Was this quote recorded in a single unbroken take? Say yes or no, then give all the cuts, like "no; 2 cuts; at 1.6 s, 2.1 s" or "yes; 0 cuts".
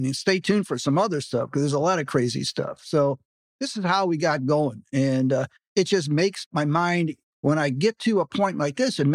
yes; 0 cuts